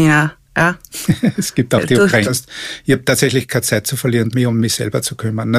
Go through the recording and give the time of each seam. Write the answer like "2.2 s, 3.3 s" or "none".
2.2 s, 4.3 s

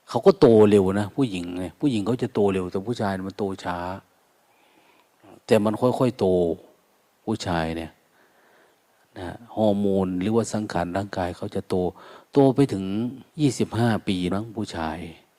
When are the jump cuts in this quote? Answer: 13.3 s, 14.3 s

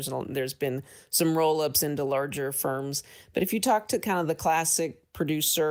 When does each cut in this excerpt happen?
none

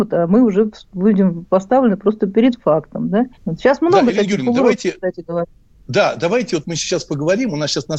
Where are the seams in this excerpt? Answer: 3.3 s

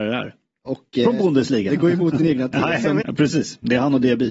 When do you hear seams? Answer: 1.7 s, 3.0 s

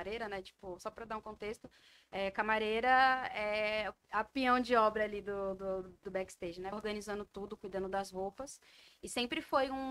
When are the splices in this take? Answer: 6.7 s

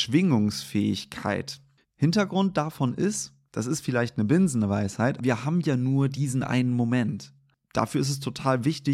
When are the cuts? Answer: 1.8 s, 5.2 s

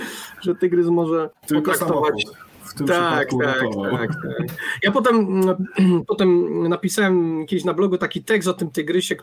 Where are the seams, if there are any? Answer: none

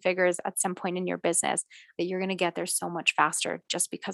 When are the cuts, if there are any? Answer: 1.9 s

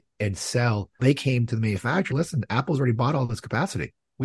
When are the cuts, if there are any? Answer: 1.0 s, 2.1 s

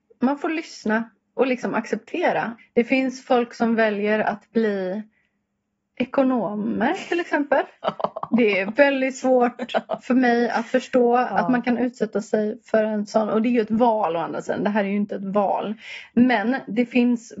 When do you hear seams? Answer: 1.4 s

